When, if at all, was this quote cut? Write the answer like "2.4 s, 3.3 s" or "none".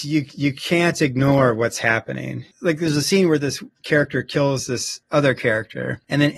none